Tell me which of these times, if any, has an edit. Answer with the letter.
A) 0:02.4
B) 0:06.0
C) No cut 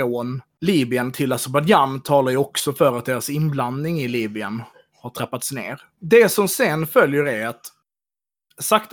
B